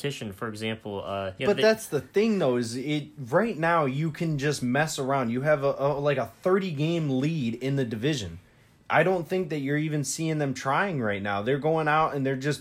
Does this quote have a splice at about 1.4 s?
yes; 1 cut; at 1.4 s

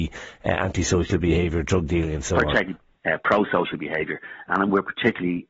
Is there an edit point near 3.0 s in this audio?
yes; 1 cut; at 3.0 s

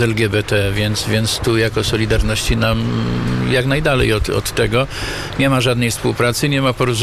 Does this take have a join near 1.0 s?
no; 0 cuts

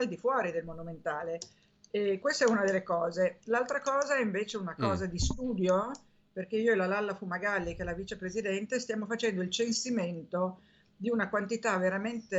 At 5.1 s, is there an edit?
no; 1 cut; at 2.2 s

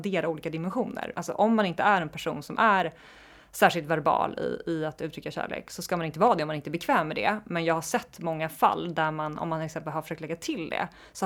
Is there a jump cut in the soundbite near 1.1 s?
yes; 1 cut; at 1.1 s

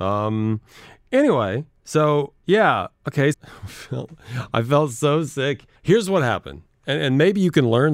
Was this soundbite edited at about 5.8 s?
yes; 2 cuts; at 3.3 s, 5.8 s

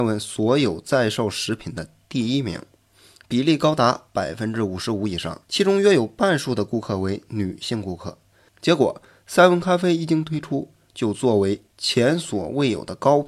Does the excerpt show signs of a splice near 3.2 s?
no; 2 cuts; at 5.4 s, 8.5 s

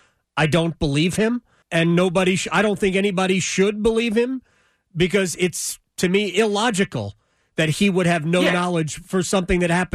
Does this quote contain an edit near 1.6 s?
yes; 1 cut; at 1.6 s

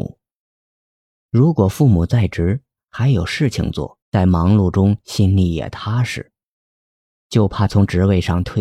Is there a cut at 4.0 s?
yes; 1 cut; at 4.0 s

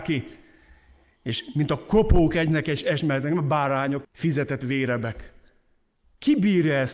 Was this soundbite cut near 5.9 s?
no; 1 cut; at 4.0 s

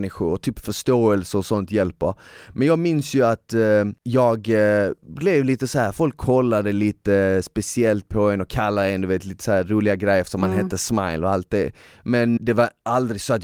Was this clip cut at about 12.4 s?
yes; 1 cut; at 12.4 s

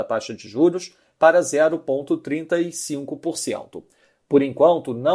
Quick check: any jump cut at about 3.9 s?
no; 0 cuts

